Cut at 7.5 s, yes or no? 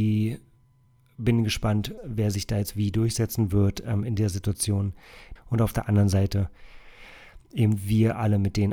no